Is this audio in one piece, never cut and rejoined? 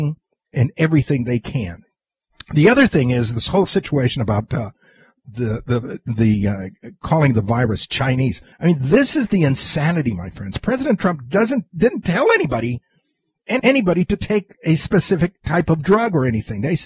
no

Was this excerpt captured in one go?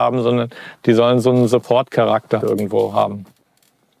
no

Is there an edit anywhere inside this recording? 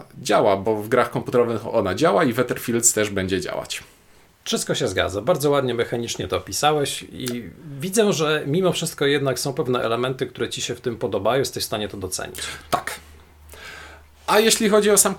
no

